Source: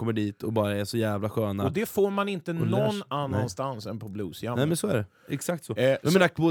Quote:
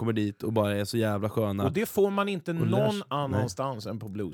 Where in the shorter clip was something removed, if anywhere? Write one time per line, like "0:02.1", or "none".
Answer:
none